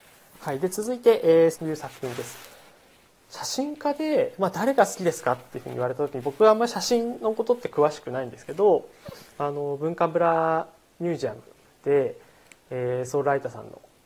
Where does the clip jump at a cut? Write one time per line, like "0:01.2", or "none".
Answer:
0:01.5